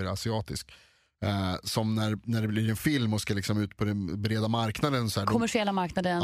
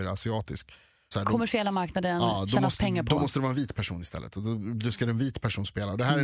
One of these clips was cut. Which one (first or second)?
second